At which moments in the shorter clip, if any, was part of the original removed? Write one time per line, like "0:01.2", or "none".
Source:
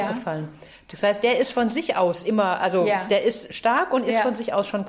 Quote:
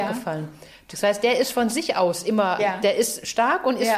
0:02.6

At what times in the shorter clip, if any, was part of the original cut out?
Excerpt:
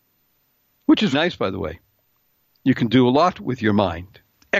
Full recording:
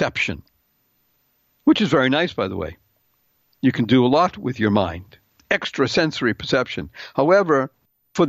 0:01.1

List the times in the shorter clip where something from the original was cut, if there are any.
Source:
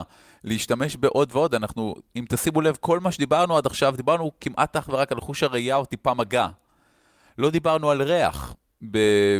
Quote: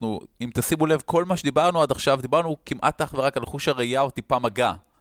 none

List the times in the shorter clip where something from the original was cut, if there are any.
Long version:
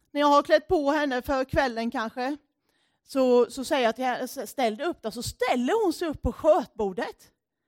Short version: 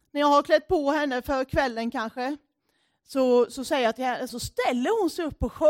0:04.3

